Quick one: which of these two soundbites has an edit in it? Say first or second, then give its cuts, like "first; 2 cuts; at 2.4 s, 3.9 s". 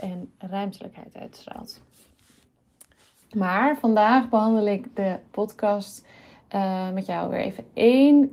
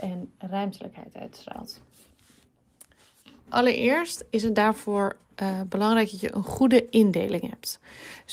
first; 1 cut; at 3.2 s